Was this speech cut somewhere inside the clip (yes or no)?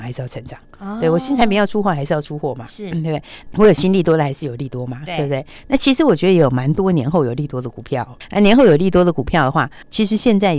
no